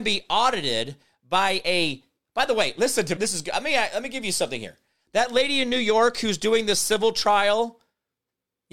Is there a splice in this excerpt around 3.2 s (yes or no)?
yes